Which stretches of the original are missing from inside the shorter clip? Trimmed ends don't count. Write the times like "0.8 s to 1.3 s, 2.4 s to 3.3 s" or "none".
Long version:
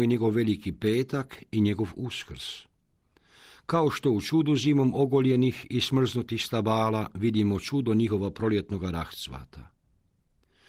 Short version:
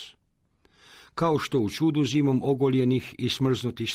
none